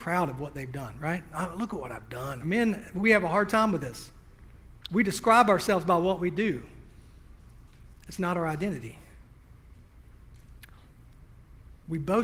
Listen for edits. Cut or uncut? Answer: cut